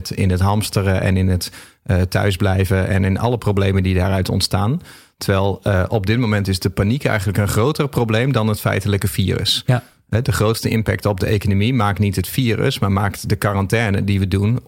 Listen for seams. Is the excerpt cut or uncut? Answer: uncut